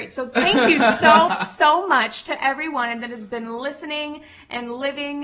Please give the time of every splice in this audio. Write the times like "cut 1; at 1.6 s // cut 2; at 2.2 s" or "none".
cut 1; at 1.3 s